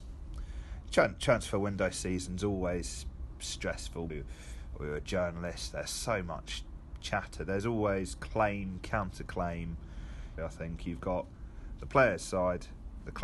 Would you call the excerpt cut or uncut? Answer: cut